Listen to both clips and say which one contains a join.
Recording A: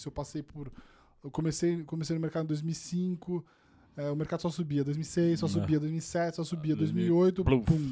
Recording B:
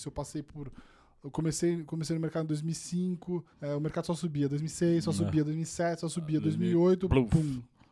B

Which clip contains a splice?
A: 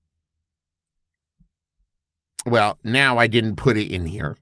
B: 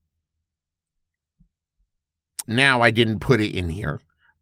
B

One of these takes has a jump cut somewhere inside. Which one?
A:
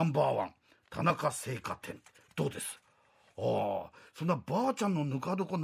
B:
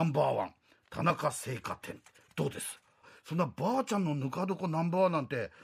B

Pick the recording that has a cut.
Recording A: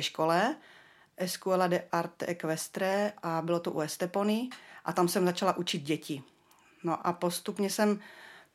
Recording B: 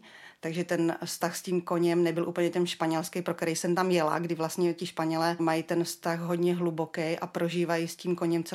B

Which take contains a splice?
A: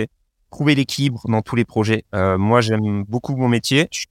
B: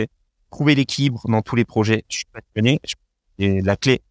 B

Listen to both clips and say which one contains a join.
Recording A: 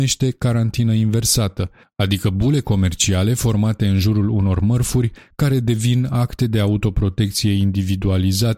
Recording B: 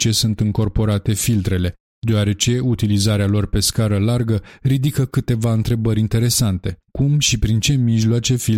B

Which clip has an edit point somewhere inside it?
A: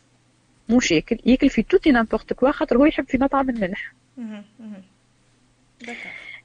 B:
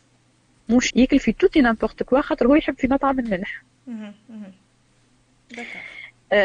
B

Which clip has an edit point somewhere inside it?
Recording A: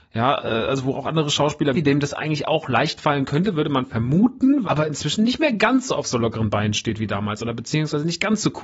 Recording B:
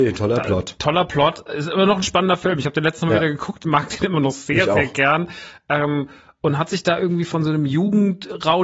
A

